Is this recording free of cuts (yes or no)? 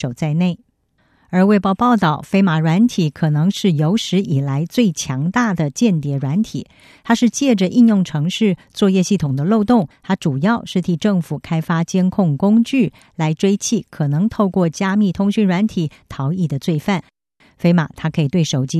no